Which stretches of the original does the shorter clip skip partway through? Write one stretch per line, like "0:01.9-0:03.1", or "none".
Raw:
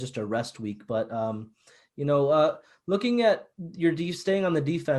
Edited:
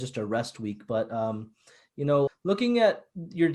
0:02.3-0:02.7